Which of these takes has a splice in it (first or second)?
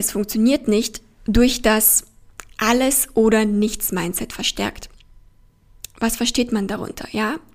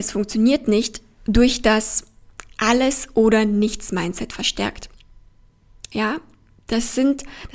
second